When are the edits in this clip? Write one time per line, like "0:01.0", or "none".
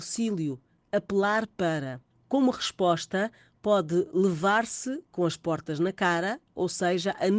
none